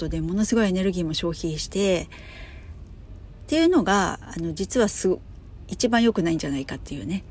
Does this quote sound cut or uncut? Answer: cut